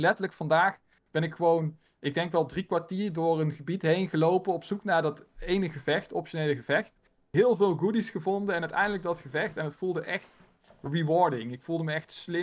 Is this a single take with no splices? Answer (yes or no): yes